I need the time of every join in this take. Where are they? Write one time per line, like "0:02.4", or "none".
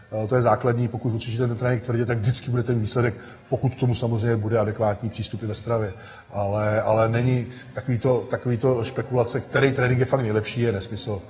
none